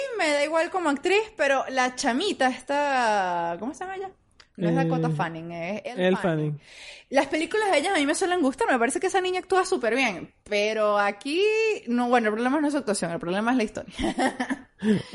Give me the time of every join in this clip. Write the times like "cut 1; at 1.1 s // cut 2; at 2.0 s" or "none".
none

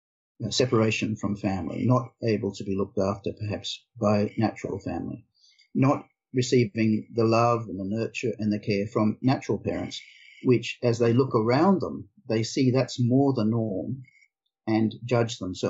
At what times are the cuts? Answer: none

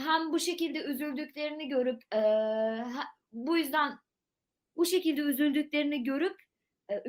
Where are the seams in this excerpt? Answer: cut 1; at 2.1 s

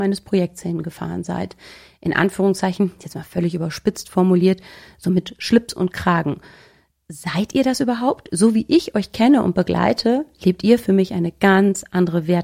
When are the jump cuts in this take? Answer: none

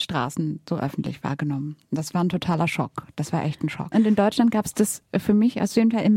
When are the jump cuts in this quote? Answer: cut 1; at 3.9 s

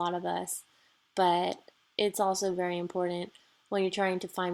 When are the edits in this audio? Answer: none

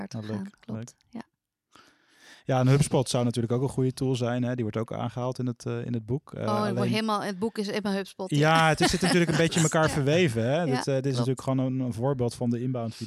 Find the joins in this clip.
none

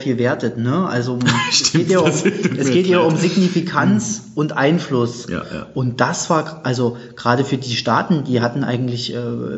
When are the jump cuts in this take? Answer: none

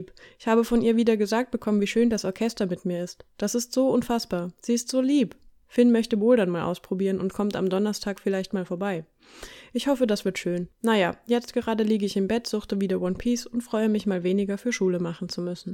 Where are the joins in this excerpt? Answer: cut 1; at 10.7 s

